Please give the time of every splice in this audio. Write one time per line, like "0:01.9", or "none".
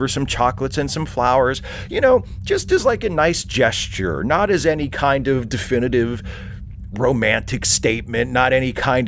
none